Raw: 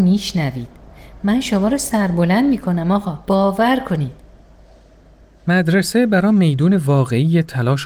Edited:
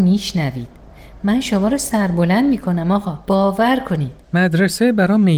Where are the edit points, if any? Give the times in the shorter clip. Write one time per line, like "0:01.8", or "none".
0:04.2